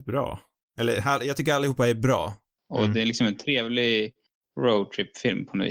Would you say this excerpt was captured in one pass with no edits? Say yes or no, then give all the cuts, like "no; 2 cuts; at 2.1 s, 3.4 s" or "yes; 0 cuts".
no; 1 cut; at 2.6 s